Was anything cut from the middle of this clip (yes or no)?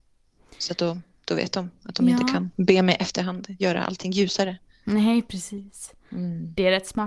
no